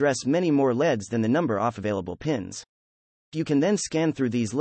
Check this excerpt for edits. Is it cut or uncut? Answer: uncut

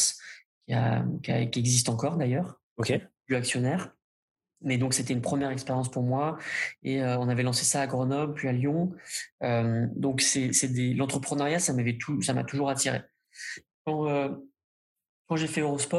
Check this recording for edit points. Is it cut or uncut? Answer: uncut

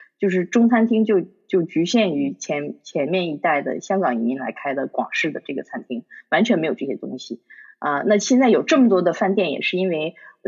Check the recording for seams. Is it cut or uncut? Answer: uncut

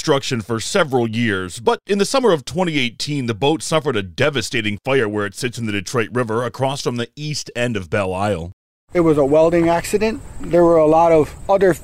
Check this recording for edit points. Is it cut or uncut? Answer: uncut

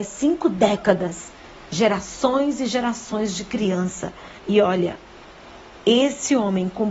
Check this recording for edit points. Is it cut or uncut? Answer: cut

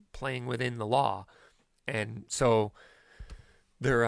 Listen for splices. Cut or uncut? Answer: uncut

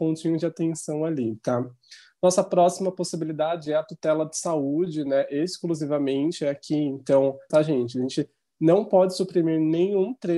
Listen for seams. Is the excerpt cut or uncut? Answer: cut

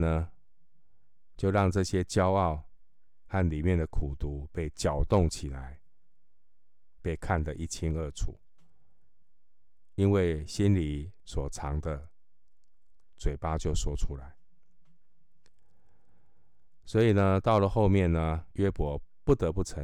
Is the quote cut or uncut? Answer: cut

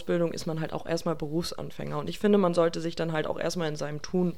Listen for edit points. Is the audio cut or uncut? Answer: uncut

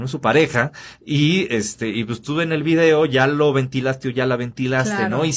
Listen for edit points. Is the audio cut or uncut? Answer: uncut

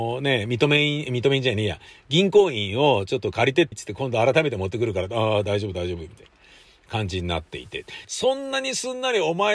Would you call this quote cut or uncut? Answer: cut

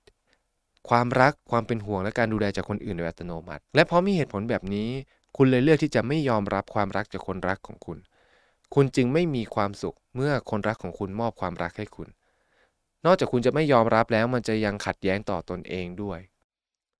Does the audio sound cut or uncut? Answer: cut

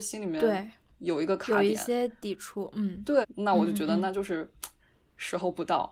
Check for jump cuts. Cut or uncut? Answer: cut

